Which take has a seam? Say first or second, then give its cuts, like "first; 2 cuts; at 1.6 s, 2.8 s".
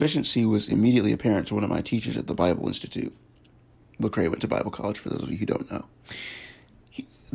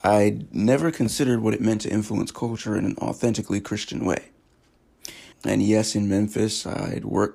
second; 1 cut; at 5.3 s